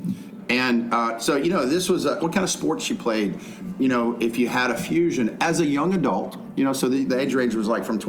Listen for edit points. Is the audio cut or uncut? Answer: cut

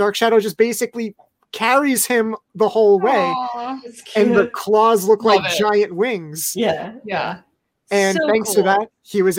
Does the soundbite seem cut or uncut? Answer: uncut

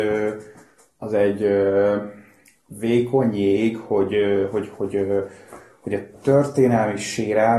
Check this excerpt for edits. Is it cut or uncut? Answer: uncut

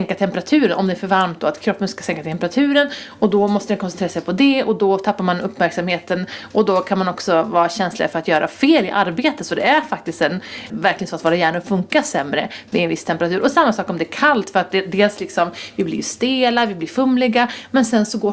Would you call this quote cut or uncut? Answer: cut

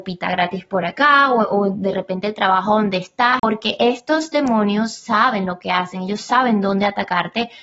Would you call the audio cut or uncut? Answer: cut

